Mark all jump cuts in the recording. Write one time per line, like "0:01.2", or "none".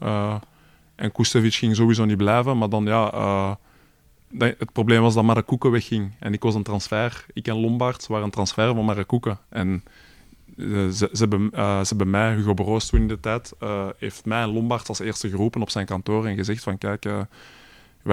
none